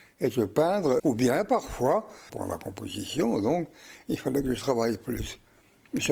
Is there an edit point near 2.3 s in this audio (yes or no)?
yes